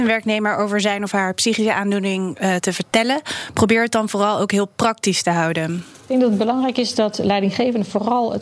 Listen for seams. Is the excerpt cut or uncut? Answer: uncut